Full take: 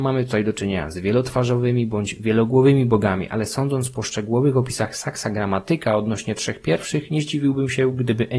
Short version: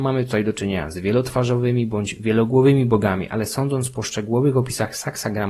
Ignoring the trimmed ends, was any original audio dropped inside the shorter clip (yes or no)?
no